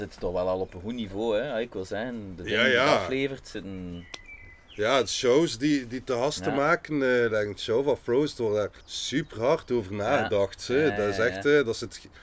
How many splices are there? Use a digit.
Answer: 1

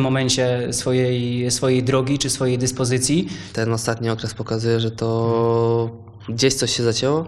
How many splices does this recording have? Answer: 1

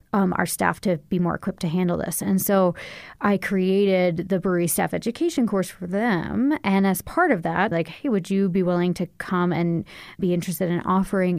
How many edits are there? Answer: 2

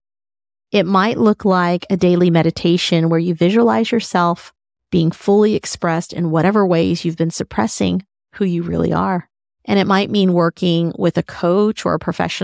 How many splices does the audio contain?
1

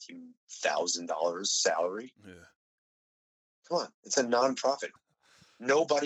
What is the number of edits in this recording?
1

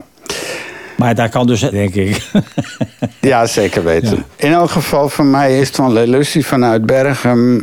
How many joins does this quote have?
1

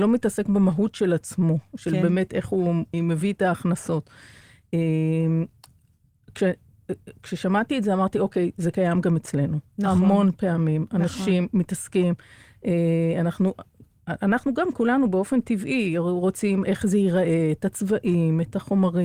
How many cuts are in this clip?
1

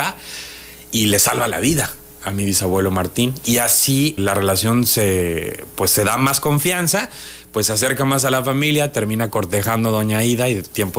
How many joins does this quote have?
1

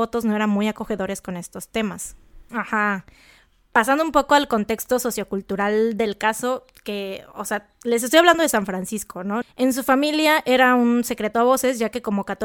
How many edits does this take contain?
2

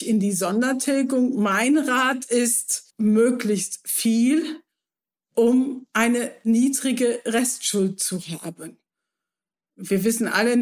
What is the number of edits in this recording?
1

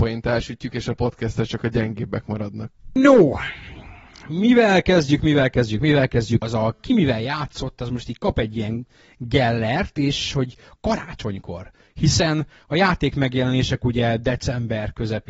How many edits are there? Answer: 2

